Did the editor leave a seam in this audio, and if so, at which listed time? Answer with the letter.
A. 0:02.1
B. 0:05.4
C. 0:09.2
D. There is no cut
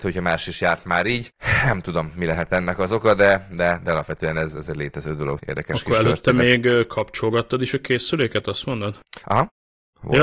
B